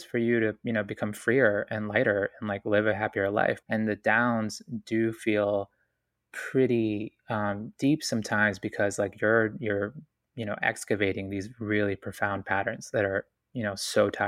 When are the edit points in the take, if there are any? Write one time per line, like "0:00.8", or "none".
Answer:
0:03.6